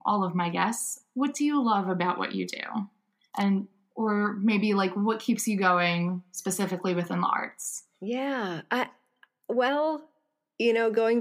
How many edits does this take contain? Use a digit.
0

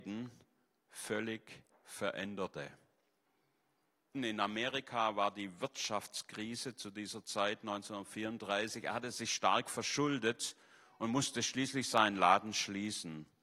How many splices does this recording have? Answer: 1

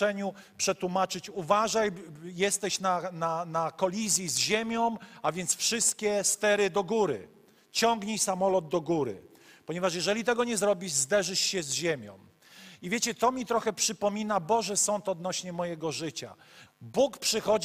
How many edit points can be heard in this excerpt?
1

